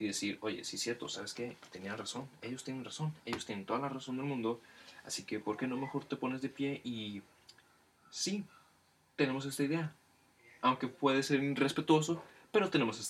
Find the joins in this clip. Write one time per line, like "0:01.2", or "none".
none